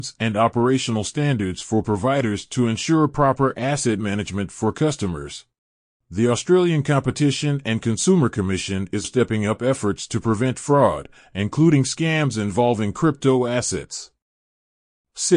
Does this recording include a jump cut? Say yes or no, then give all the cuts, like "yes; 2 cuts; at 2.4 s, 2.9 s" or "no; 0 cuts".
yes; 2 cuts; at 5.9 s, 9.0 s